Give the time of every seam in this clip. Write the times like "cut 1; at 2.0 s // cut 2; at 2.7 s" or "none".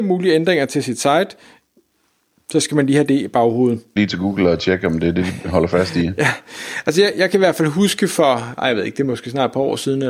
cut 1; at 4.0 s

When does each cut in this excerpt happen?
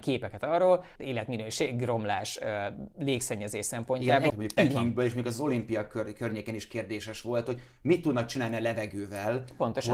cut 1; at 1.0 s // cut 2; at 4.3 s

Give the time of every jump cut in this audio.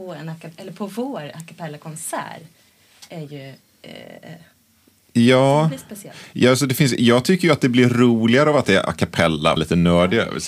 cut 1; at 9.6 s

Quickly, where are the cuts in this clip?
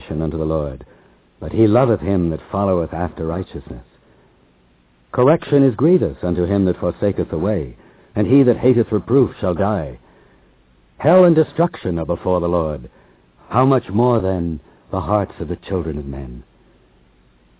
none

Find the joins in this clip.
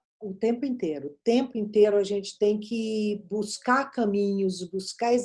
none

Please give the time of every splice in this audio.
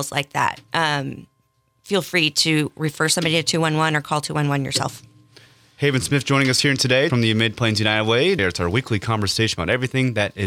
cut 1; at 7.1 s // cut 2; at 8.4 s

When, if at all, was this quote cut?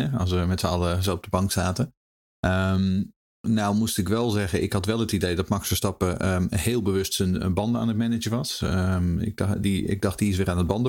none

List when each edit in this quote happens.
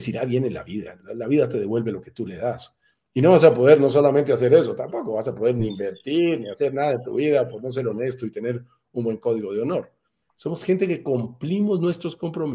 cut 1; at 10.2 s

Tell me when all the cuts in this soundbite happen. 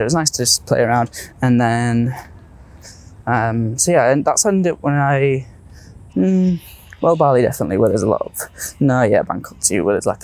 cut 1; at 1.3 s // cut 2; at 6.1 s

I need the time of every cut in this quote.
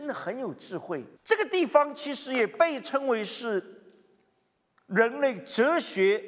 cut 1; at 1.2 s

